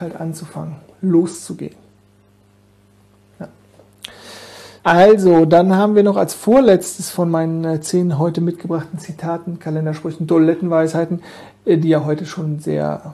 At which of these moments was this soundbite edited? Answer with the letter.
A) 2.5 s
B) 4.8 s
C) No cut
B